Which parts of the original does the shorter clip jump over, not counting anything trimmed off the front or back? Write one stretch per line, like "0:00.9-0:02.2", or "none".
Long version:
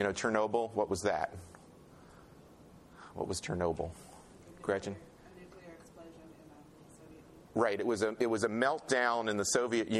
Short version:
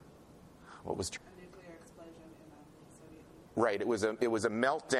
0:03.5-0:05.1